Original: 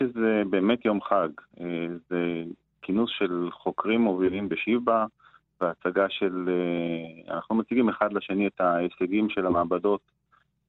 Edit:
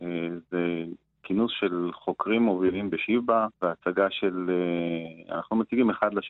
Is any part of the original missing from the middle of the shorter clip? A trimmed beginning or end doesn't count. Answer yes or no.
yes